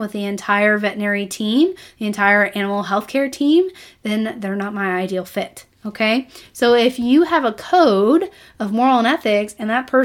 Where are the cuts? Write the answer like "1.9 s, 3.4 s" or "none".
none